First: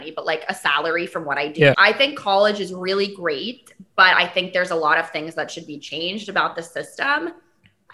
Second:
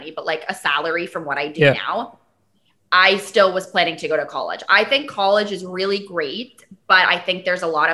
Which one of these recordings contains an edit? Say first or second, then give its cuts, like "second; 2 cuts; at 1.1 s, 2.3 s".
first; 1 cut; at 1.7 s